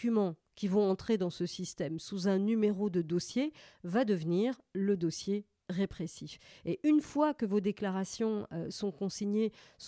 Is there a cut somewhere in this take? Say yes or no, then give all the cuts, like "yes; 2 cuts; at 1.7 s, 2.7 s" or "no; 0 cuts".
no; 0 cuts